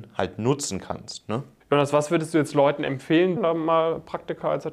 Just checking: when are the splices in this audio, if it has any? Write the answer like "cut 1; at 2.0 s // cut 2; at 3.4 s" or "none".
cut 1; at 1.6 s // cut 2; at 3.4 s